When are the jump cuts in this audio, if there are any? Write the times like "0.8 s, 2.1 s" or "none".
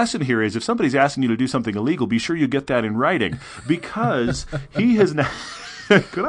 none